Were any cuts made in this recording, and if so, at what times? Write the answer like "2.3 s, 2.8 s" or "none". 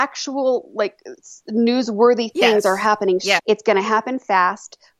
3.4 s